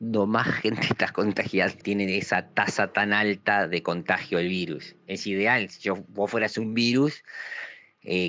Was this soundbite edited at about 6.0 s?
no; 1 cut; at 1.8 s

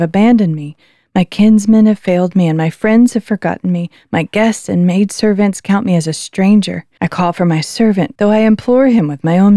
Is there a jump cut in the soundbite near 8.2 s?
yes; 2 cuts; at 7.0 s, 8.2 s

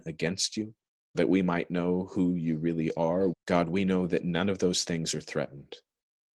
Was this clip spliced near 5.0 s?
no; 2 cuts; at 1.1 s, 3.3 s

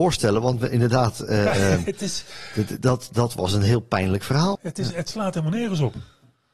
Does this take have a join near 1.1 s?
no; 2 cuts; at 2.8 s, 4.5 s

